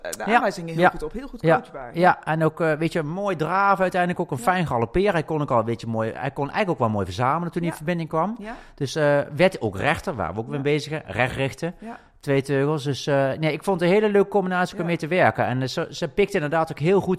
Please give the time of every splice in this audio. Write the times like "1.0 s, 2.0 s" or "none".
none

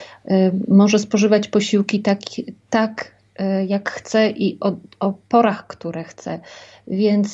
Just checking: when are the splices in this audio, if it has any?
none

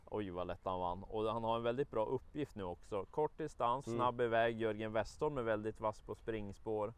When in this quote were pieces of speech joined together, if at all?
3.8 s

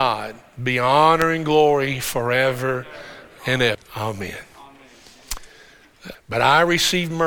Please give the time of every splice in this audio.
3.7 s, 6.1 s

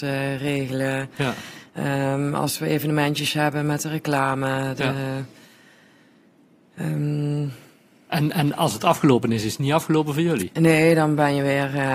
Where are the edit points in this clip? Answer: none

